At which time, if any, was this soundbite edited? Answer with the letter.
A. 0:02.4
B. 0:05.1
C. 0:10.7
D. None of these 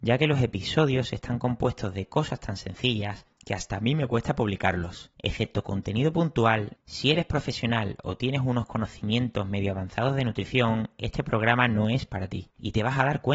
B